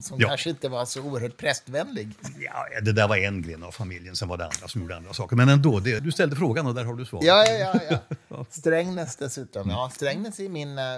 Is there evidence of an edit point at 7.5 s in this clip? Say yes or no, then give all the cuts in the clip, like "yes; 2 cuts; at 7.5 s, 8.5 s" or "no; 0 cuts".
no; 1 cut; at 6.0 s